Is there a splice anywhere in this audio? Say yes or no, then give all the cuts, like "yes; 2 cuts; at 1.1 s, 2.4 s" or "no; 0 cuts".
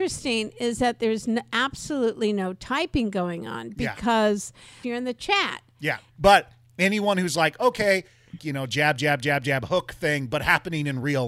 yes; 3 cuts; at 4.8 s, 6.1 s, 8.4 s